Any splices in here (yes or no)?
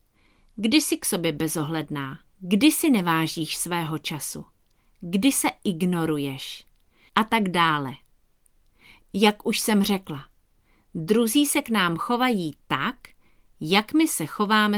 yes